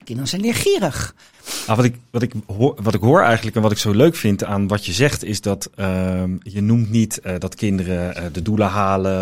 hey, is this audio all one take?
no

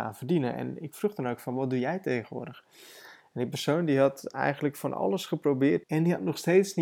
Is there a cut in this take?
yes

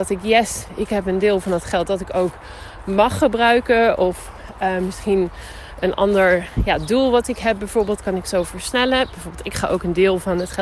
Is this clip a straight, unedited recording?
yes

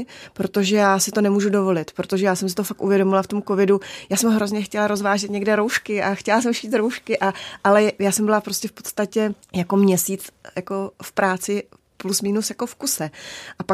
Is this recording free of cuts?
no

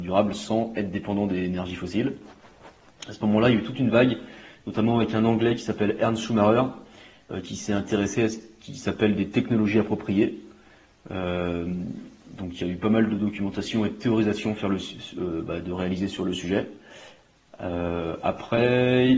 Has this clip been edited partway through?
no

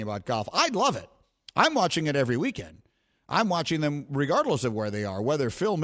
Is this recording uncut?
yes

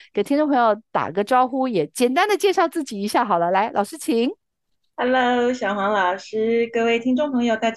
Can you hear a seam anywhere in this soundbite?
no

